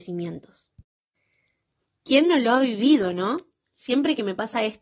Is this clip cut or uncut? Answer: uncut